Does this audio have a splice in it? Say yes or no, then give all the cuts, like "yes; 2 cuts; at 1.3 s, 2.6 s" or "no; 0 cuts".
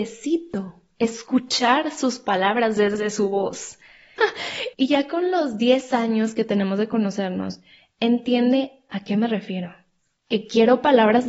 yes; 1 cut; at 4.2 s